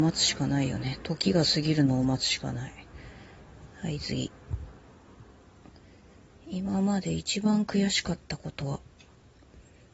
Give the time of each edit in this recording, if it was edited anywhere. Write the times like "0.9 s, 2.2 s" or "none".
none